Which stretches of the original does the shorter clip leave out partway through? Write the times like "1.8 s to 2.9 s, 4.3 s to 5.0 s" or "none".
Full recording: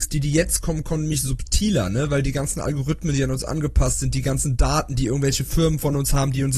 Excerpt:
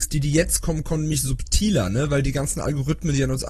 none